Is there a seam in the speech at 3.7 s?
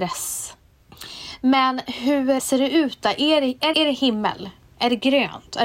yes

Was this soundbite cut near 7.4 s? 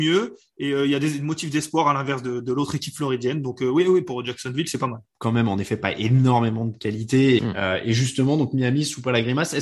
yes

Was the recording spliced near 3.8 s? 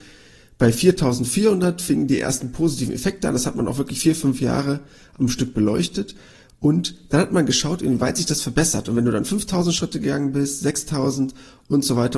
no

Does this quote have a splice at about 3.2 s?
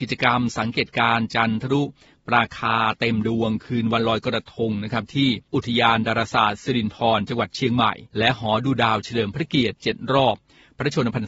no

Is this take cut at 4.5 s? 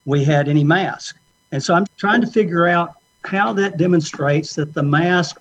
no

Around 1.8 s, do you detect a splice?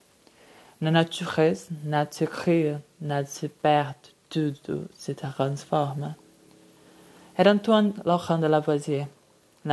no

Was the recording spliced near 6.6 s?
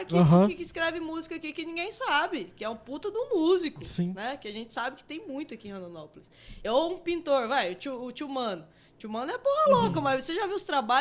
no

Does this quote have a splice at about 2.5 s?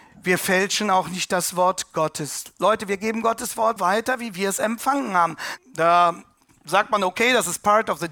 no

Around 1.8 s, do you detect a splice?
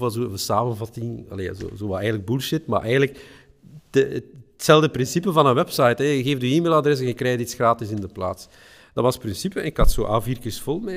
no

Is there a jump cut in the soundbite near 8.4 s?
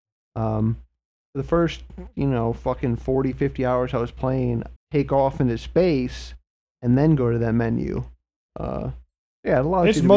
yes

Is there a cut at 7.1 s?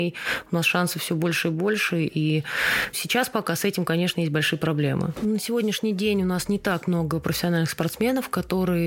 no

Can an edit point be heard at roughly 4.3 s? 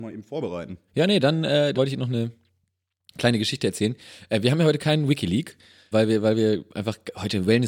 no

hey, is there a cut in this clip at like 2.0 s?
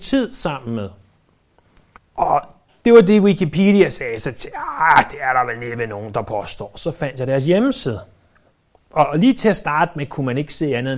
yes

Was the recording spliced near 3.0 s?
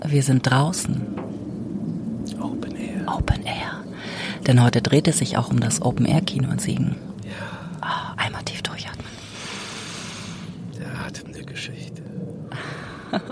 no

